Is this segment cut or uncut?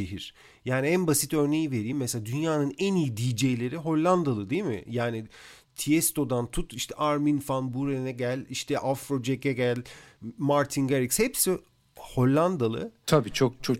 uncut